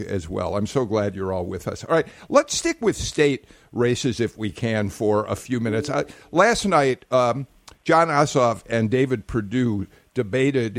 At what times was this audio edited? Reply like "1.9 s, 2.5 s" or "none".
none